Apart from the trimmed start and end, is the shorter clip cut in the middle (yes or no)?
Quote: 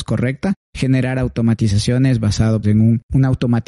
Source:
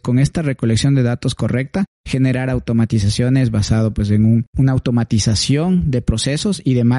yes